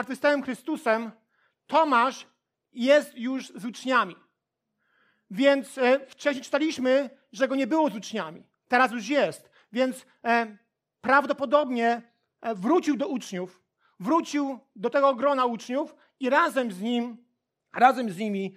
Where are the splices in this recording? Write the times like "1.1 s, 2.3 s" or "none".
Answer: none